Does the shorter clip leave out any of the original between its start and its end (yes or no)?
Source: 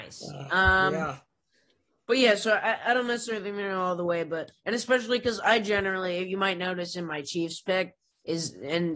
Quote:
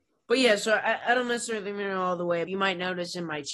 yes